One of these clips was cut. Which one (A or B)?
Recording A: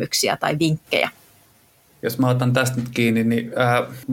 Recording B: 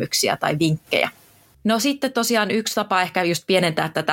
B